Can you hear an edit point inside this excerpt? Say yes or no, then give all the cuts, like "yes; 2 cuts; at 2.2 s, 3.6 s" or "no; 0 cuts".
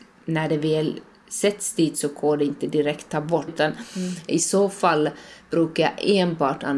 yes; 1 cut; at 3.5 s